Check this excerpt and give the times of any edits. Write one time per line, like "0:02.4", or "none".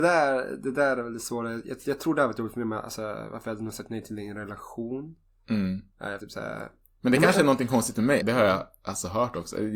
0:06.2
0:08.2